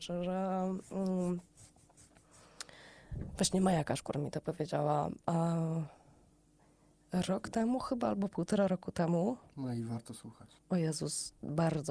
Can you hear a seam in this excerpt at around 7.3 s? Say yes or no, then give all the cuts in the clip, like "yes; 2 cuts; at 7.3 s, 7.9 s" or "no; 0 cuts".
no; 1 cut; at 10.6 s